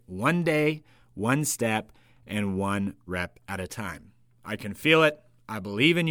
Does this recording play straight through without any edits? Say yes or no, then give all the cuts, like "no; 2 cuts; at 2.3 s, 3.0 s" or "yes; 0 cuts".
no; 1 cut; at 4.4 s